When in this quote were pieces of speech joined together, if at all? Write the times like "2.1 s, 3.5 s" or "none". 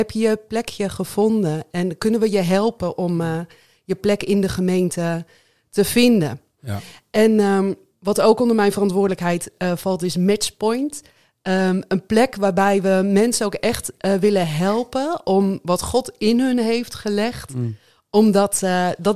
none

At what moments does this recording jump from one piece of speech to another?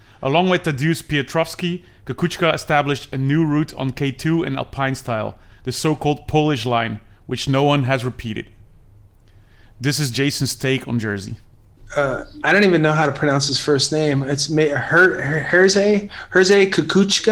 none

